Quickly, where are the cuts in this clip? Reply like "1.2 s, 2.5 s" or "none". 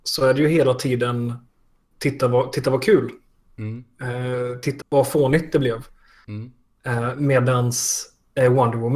4.8 s